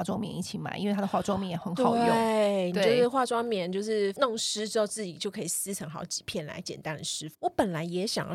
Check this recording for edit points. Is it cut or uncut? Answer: cut